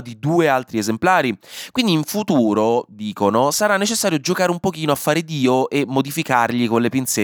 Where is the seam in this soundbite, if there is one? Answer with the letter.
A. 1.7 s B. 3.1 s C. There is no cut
C